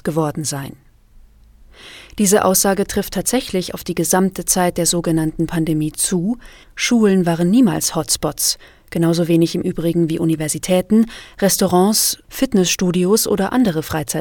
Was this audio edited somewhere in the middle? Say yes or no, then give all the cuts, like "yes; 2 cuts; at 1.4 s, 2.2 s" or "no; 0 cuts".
yes; 2 cuts; at 6.6 s, 12.2 s